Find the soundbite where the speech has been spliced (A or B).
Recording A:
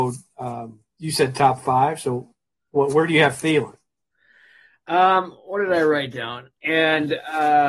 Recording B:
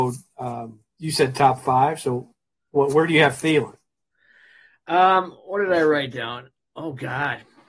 A